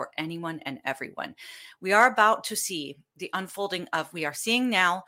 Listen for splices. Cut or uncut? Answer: uncut